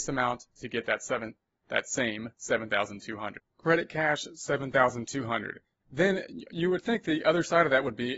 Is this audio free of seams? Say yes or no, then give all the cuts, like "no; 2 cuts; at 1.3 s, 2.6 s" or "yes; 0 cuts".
yes; 0 cuts